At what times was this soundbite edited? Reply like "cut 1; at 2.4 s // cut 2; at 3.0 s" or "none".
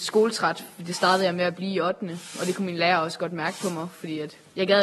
none